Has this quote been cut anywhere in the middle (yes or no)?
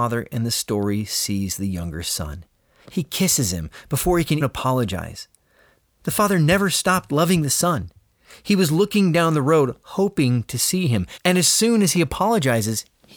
yes